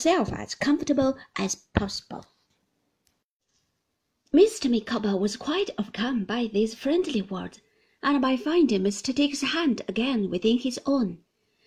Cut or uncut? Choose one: uncut